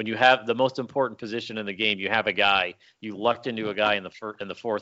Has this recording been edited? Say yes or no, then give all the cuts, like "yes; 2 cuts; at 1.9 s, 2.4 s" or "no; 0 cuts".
no; 0 cuts